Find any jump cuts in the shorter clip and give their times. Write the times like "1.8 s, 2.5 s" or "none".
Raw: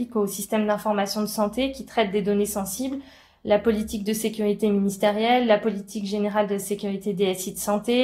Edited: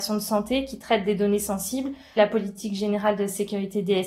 2.2 s